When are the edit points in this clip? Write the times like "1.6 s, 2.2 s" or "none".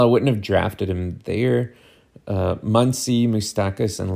none